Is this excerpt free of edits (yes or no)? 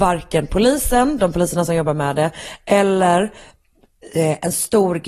yes